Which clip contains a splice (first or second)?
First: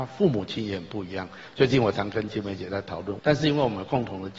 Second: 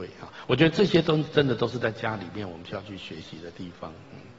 first